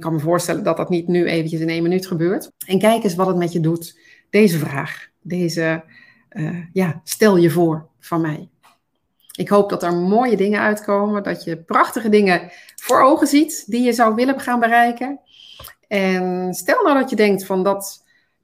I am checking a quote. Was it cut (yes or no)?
yes